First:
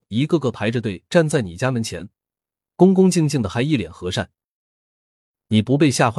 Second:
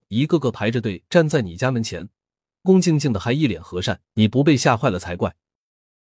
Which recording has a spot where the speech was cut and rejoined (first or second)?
second